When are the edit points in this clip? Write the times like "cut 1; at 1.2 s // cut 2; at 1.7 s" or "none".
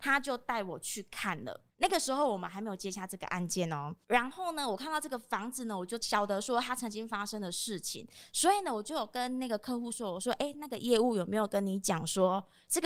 cut 1; at 1.7 s